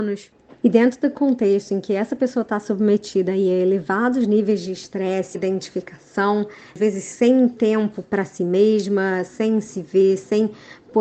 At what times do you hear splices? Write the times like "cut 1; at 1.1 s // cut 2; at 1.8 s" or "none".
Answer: cut 1; at 5.3 s // cut 2; at 9.3 s